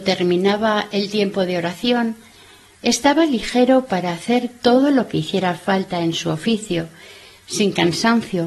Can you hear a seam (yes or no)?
no